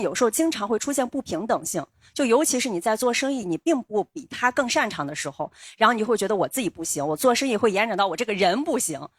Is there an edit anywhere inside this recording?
no; 0 cuts

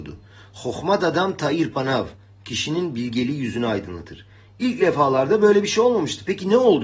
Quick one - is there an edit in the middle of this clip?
no; 0 cuts

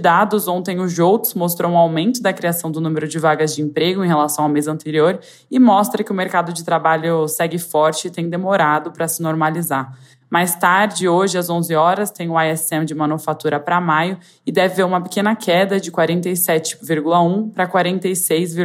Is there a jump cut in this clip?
no; 0 cuts

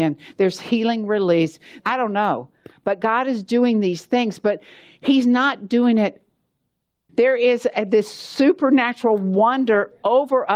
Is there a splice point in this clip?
yes; 2 cuts; at 1.8 s, 7.1 s

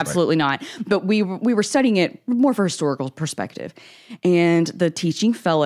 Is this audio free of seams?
yes; 0 cuts

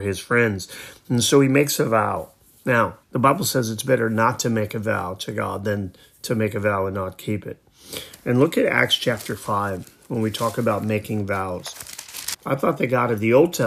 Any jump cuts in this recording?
yes; 2 cuts; at 3.0 s, 12.3 s

